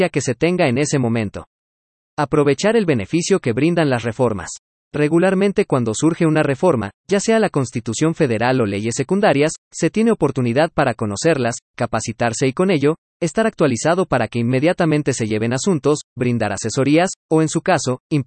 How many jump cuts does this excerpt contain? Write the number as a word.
zero